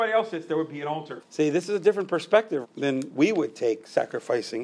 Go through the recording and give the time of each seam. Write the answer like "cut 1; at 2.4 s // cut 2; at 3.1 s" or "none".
cut 1; at 1.2 s // cut 2; at 2.6 s